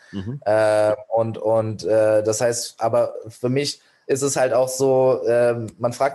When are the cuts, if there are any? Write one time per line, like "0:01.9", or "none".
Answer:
none